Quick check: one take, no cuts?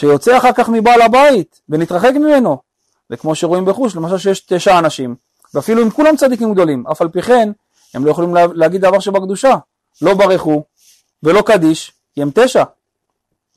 no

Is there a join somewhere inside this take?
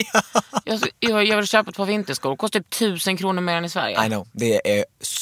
no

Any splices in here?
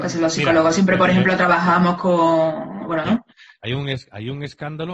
yes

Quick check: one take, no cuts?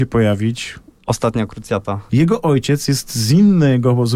no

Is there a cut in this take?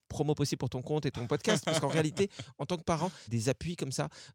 yes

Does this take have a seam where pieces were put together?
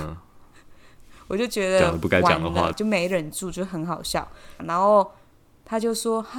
yes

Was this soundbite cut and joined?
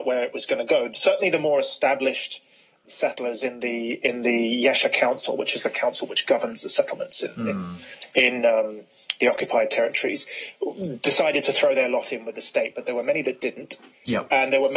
yes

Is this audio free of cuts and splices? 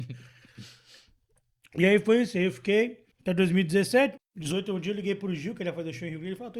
no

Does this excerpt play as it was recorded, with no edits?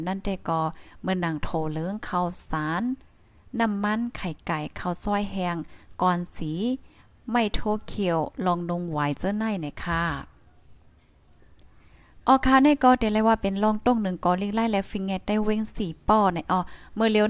yes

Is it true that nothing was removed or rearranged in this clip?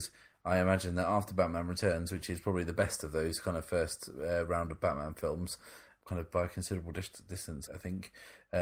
no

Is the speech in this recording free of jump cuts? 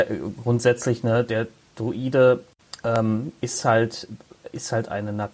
yes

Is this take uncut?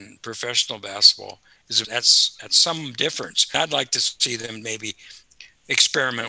yes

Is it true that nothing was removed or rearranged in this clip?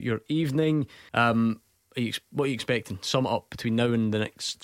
no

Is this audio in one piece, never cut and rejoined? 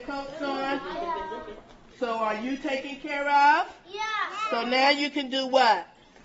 yes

